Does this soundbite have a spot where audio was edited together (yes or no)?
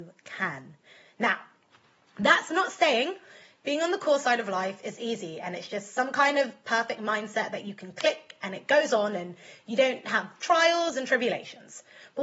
yes